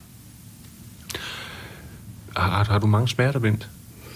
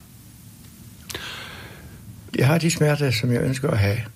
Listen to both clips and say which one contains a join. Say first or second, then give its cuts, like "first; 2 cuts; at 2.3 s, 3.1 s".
second; 1 cut; at 2.3 s